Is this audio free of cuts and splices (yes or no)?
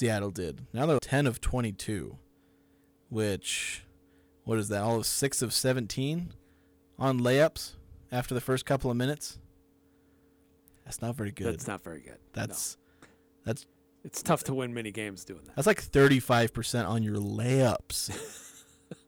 no